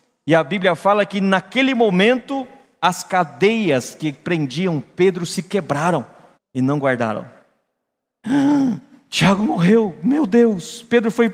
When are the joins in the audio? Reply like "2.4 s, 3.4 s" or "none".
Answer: 6.3 s